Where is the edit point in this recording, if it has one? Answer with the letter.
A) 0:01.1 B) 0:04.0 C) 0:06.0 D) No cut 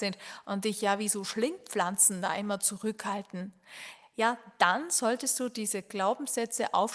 D